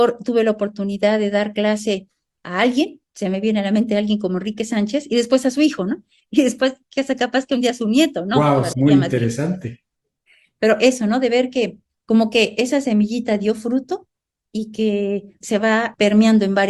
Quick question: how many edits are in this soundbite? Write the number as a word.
two